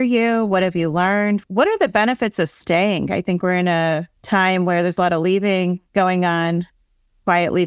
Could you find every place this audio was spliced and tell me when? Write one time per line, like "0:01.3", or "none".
0:04.2